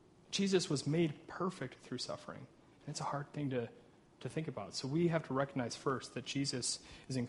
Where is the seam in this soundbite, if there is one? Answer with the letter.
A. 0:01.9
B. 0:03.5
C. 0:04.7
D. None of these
D